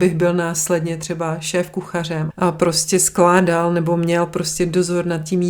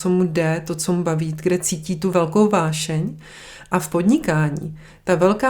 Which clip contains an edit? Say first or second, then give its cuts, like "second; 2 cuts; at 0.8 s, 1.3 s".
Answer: first; 1 cut; at 2.3 s